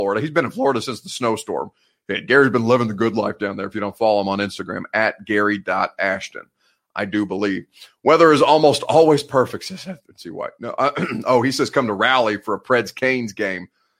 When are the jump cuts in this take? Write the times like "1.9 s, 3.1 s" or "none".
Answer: none